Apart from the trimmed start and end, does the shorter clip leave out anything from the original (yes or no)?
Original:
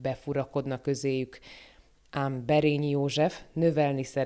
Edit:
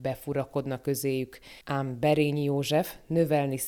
yes